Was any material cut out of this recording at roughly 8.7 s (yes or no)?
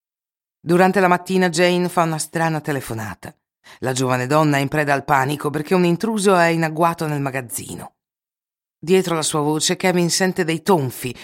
no